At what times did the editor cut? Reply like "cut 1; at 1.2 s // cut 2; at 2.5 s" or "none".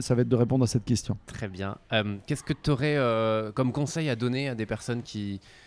cut 1; at 1.2 s // cut 2; at 3.5 s